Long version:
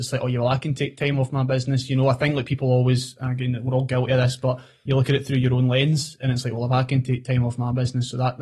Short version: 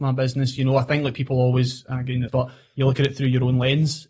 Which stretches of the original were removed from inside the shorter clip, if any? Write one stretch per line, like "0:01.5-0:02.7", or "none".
0:03.6-0:04.4